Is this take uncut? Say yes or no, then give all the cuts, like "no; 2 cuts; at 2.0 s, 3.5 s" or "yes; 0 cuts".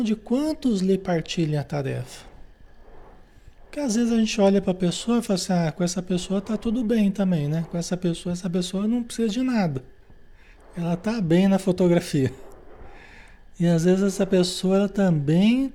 yes; 0 cuts